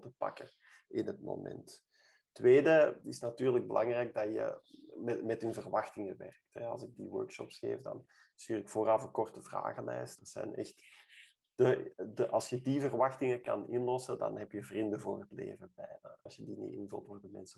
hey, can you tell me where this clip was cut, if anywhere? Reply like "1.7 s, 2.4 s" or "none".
6.9 s, 10.2 s, 16.3 s